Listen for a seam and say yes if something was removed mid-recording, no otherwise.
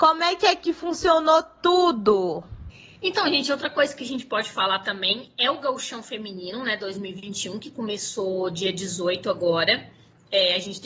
no